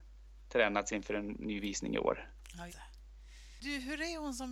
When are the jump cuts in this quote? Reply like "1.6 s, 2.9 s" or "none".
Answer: 2.7 s